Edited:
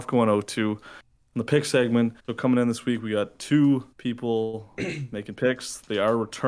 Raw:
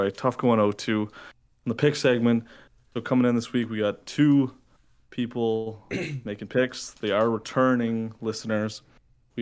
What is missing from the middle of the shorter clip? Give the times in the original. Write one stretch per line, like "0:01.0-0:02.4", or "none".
0:02.5-0:02.9
0:04.6-0:05.0